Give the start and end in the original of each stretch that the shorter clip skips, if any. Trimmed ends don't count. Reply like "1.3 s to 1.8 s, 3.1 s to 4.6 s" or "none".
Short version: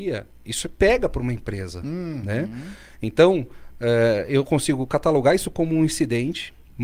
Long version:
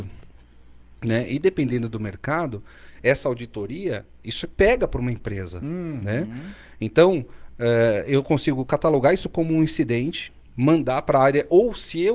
none